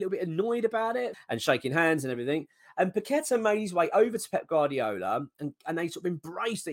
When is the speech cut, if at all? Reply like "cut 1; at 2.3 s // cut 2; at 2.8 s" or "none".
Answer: cut 1; at 1.1 s